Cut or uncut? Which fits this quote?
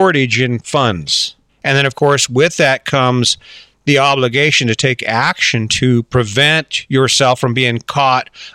cut